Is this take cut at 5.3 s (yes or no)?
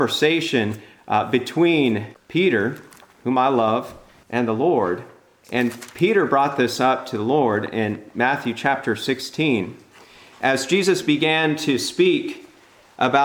no